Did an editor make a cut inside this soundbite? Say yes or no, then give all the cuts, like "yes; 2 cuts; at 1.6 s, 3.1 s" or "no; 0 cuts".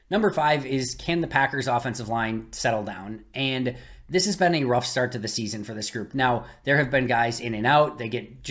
no; 0 cuts